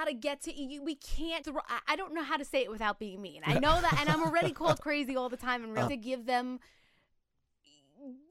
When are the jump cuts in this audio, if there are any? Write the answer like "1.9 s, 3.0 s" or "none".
1.4 s, 5.9 s

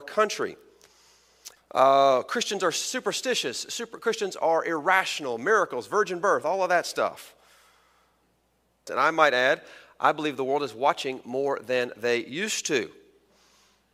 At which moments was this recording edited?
1.6 s, 8.9 s

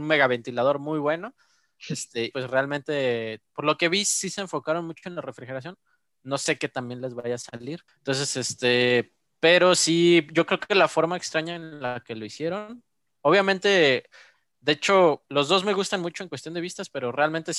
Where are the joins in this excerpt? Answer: 2.3 s, 7.9 s

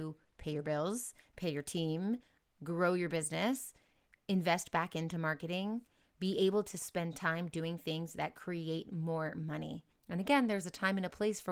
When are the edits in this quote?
9.9 s

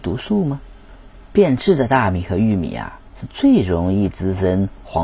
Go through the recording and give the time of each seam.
1.2 s

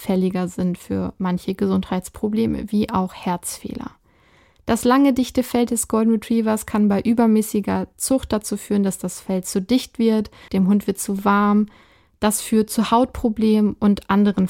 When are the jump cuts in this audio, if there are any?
10.5 s

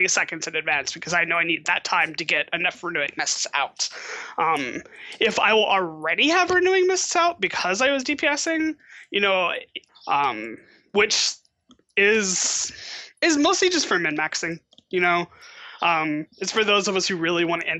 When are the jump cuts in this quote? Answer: 9.9 s

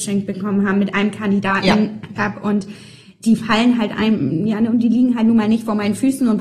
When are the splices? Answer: 2.2 s

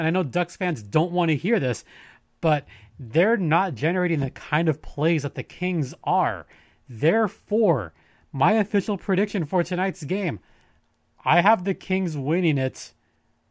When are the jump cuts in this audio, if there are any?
none

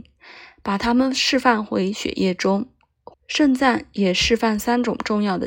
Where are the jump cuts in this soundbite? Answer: 3.1 s

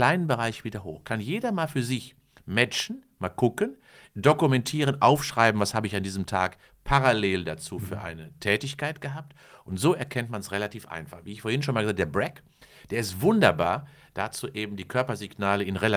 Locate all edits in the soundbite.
none

